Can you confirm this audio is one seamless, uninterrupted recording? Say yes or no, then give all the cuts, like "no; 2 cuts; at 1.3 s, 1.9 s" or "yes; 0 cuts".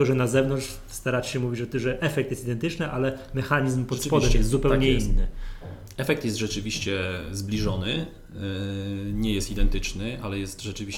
yes; 0 cuts